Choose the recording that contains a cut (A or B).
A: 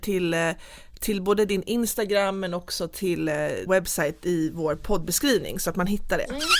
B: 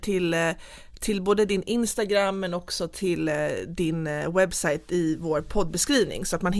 A